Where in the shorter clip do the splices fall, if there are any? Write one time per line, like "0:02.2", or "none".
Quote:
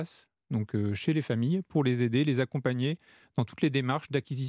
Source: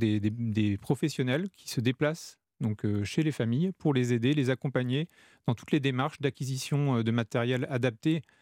none